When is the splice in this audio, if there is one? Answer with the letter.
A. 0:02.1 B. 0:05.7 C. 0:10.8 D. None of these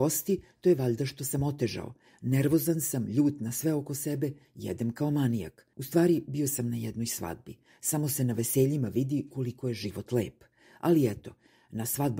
B